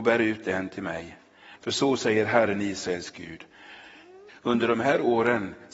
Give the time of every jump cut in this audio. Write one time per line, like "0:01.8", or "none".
0:01.6
0:04.3